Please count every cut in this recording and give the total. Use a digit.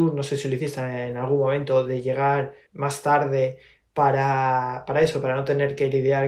1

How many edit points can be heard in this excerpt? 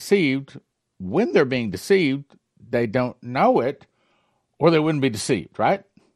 0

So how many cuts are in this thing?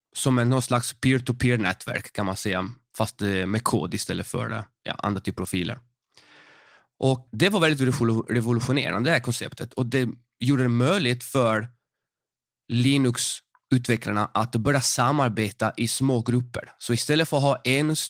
1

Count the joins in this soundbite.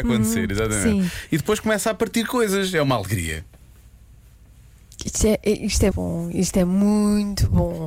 1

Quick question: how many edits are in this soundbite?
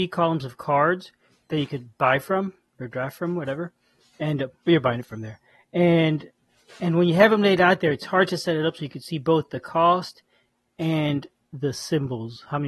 0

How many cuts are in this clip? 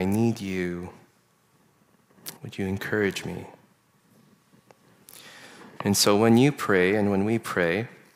2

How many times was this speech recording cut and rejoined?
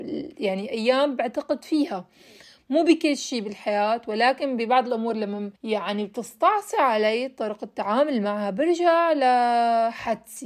1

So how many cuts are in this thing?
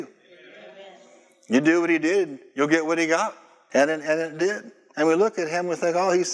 1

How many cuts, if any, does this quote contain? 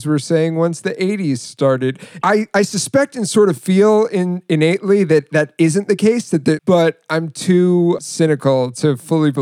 3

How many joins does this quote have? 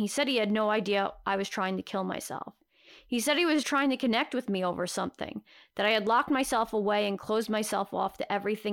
1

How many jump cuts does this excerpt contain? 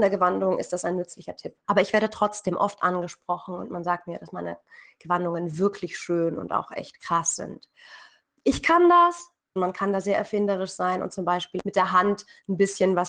3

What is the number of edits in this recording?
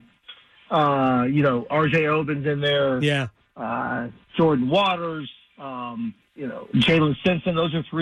1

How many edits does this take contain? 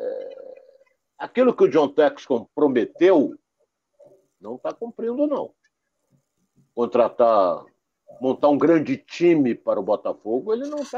0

